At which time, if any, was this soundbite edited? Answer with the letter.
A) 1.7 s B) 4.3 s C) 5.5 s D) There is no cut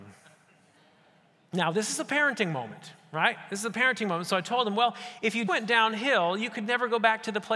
C